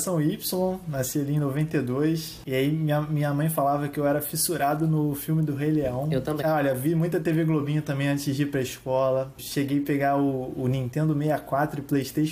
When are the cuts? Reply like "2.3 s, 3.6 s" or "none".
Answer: 6.4 s